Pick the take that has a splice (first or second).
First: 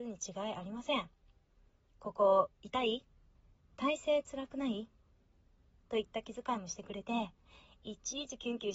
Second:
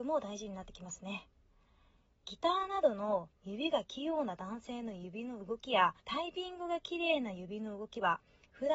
second